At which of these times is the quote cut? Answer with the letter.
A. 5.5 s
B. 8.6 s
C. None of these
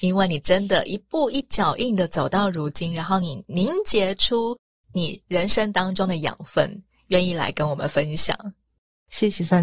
C